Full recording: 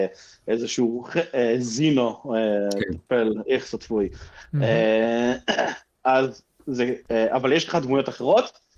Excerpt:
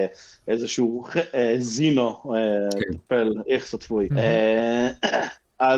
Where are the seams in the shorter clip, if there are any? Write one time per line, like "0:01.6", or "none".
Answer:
0:04.1